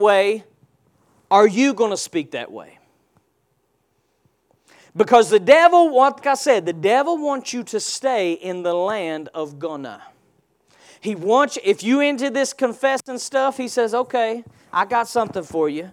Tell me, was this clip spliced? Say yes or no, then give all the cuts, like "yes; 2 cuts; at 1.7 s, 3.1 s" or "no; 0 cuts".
yes; 1 cut; at 6.2 s